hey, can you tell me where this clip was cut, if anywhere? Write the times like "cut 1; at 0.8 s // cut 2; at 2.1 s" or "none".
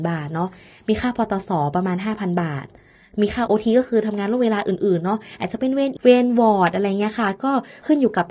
cut 1; at 3.5 s // cut 2; at 6.0 s